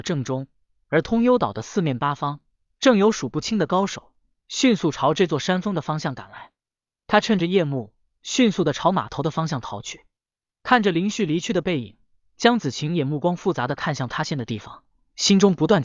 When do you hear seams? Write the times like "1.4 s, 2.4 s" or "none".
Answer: none